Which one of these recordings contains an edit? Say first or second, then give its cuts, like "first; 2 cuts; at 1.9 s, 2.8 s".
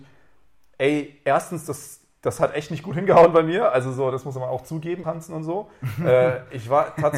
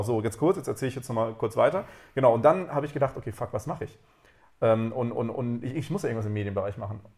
first; 1 cut; at 5.0 s